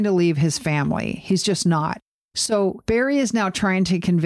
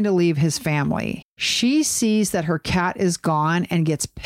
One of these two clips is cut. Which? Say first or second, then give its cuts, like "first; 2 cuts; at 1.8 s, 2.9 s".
second; 1 cut; at 1.2 s